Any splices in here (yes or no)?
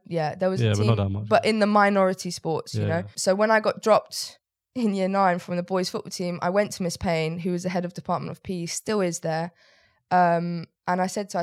no